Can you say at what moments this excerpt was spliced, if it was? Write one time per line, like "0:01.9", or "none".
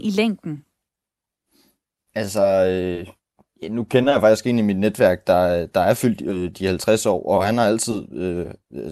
none